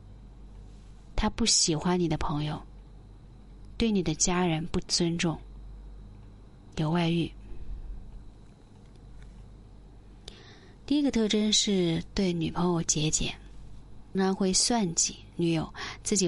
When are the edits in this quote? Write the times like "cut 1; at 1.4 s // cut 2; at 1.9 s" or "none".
cut 1; at 10.9 s // cut 2; at 14.1 s